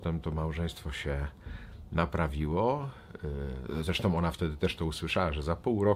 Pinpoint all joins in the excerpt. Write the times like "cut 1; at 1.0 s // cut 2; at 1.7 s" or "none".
none